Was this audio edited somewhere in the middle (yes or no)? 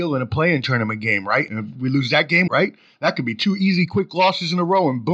yes